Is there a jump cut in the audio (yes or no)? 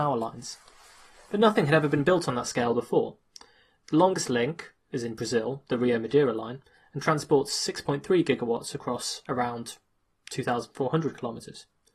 no